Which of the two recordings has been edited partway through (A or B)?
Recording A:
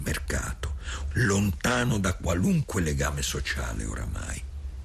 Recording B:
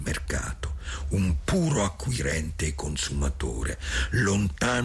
A